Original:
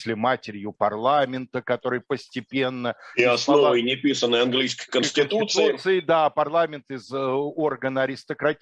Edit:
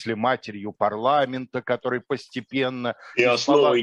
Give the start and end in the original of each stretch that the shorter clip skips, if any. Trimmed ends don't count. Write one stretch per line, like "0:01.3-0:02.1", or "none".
none